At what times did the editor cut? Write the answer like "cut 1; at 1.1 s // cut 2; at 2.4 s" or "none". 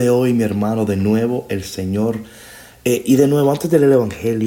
none